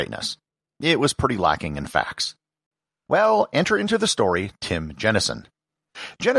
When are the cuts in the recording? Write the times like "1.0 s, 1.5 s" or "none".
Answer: 3.1 s